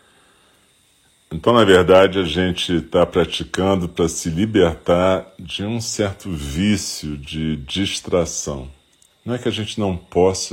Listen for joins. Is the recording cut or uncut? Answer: uncut